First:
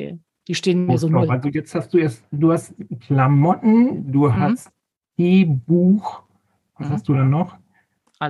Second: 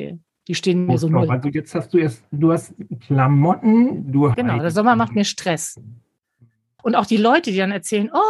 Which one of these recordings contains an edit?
second; 2 cuts; at 4.3 s, 6.8 s

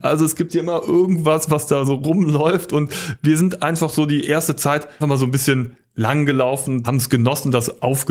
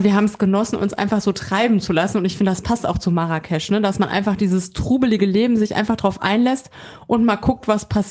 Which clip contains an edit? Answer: first; 2 cuts; at 5.0 s, 6.8 s

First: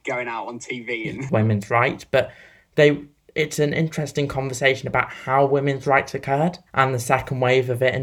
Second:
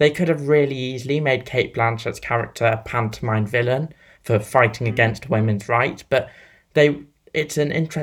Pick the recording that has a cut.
first; 2 cuts; at 1.3 s, 6.7 s

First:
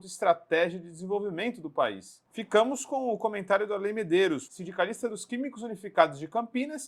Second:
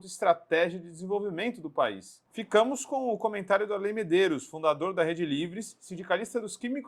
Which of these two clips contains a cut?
first; 1 cut; at 4.5 s

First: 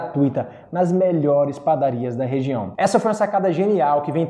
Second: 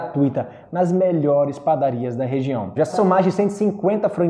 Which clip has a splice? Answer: second; 1 cut; at 2.8 s

